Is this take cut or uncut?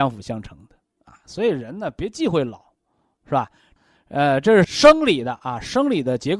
uncut